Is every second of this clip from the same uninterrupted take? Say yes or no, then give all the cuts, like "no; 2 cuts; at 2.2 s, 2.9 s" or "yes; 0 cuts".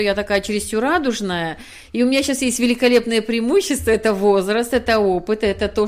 yes; 0 cuts